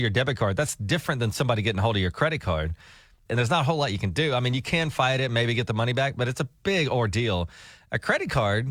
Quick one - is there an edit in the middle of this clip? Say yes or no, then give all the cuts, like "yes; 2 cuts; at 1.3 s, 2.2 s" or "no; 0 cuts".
yes; 1 cut; at 3.3 s